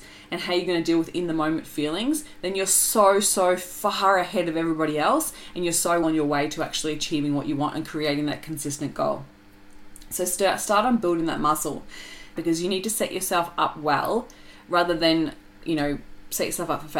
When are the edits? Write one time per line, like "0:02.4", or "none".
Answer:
0:06.0
0:12.4